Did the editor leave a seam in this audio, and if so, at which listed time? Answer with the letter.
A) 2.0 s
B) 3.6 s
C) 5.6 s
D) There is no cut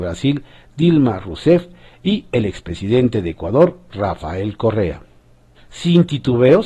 C